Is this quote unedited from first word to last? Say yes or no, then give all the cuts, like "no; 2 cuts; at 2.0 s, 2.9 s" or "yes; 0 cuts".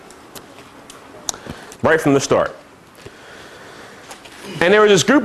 no; 1 cut; at 1.7 s